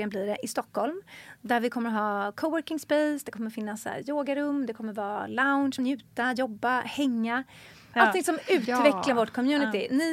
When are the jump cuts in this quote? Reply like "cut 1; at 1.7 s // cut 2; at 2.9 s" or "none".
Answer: cut 1; at 5.8 s // cut 2; at 7.9 s